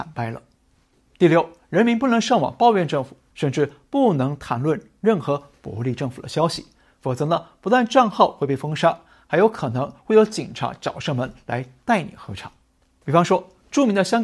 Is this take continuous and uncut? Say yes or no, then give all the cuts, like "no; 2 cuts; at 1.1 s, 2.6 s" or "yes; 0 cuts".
no; 2 cuts; at 3.3 s, 13.0 s